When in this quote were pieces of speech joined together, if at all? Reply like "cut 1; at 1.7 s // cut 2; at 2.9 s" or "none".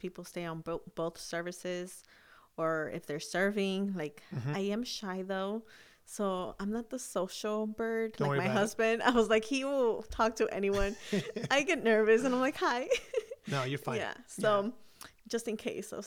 cut 1; at 4.5 s